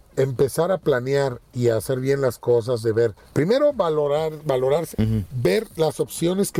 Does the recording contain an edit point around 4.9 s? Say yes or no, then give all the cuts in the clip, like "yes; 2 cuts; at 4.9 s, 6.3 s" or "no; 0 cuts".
yes; 2 cuts; at 3.2 s, 4.9 s